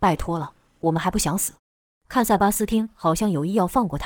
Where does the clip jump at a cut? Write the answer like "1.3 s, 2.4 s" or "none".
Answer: 1.6 s